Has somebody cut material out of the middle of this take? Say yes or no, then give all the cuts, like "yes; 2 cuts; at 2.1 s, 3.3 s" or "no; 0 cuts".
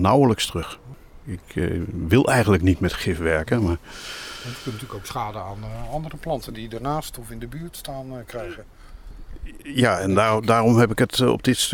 no; 0 cuts